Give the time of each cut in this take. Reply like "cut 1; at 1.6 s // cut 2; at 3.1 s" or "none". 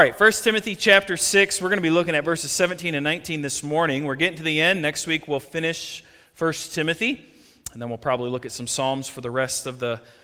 none